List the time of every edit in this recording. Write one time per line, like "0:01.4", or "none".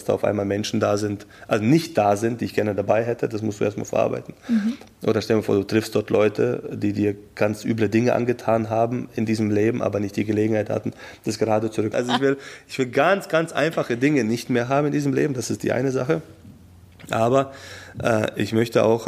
0:11.9